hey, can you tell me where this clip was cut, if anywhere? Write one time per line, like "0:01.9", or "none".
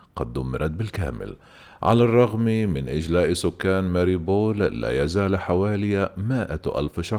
none

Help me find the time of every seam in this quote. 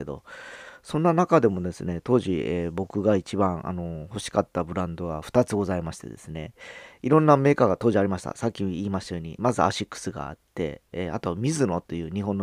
0:09.4

